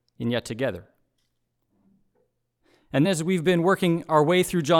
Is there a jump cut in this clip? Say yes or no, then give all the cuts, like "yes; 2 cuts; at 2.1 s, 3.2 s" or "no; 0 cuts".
yes; 1 cut; at 3.0 s